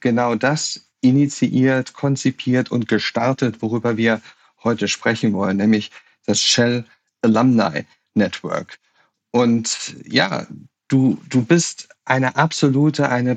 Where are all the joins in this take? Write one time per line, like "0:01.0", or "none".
none